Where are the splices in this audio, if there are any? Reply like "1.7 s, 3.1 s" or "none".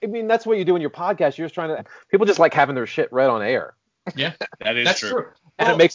1.8 s